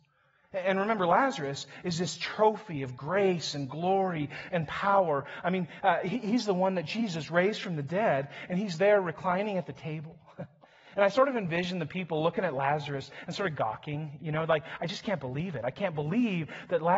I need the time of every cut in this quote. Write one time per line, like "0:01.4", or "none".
none

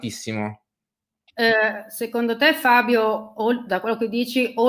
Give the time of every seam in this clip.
0:01.3

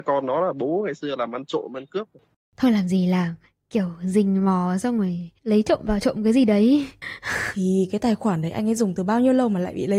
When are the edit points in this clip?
0:02.3
0:07.0

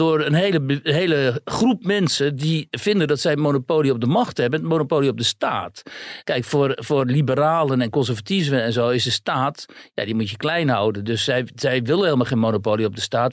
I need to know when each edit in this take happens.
0:06.2

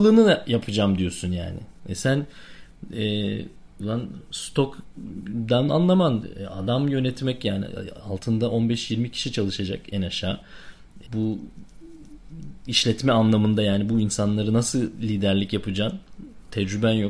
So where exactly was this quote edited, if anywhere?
0:03.8
0:11.1

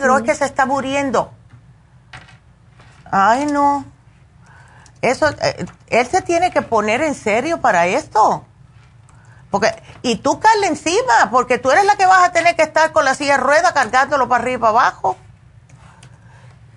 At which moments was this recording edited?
none

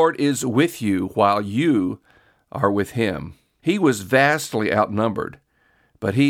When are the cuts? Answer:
0:03.6

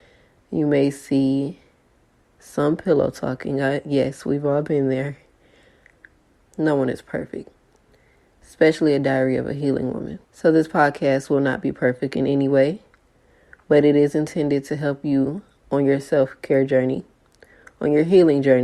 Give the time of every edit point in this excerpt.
0:06.5
0:10.2

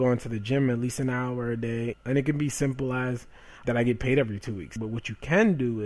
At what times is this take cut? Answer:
0:01.9
0:03.6
0:04.8

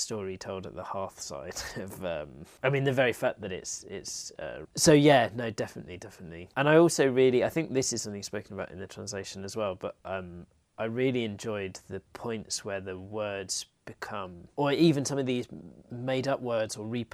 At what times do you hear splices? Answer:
0:04.6

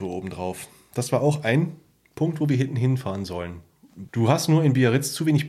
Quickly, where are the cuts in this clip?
0:04.1

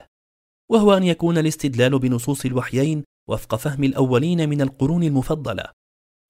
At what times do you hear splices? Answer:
none

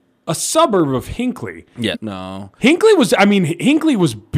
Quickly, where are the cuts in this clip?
0:01.9

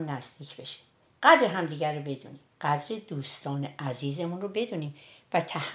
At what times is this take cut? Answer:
0:02.5

